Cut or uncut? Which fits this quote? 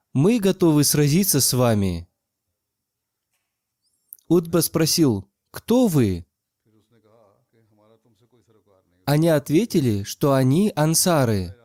uncut